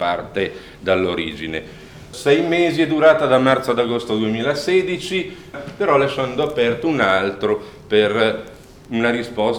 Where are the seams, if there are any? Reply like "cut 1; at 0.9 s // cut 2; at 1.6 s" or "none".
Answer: cut 1; at 5.5 s